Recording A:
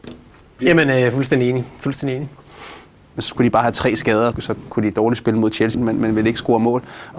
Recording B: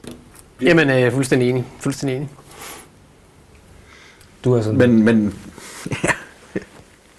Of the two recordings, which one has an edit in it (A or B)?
A